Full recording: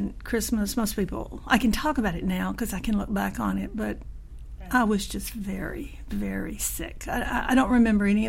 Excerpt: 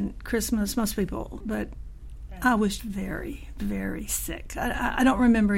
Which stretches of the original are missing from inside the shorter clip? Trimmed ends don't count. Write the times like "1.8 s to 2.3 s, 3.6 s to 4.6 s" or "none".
1.4 s to 3.7 s, 5.1 s to 5.3 s